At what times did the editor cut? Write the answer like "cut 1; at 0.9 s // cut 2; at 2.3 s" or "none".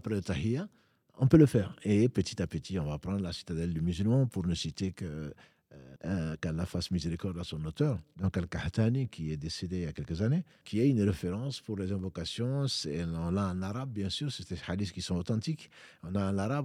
cut 1; at 6.0 s // cut 2; at 10.6 s